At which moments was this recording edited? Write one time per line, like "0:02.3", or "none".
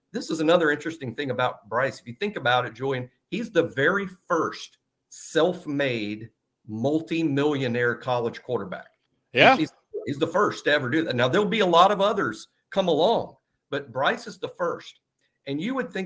none